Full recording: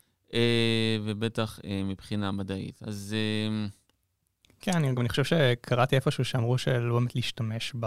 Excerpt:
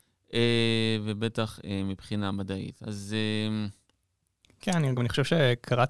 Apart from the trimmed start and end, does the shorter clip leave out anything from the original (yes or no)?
no